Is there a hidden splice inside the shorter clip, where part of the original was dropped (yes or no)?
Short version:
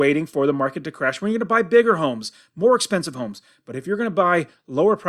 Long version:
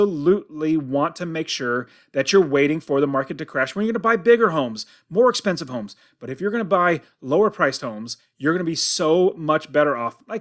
no